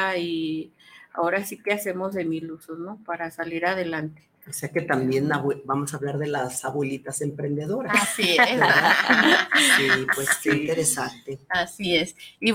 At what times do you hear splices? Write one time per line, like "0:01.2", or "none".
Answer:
none